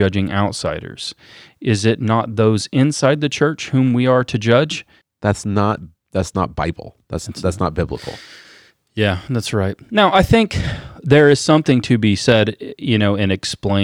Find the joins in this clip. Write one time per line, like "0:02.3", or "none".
0:05.0